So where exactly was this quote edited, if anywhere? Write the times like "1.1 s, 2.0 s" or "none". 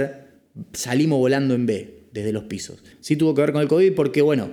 2.9 s